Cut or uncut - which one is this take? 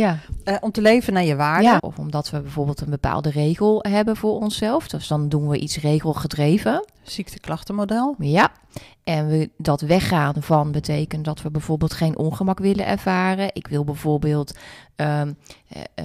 cut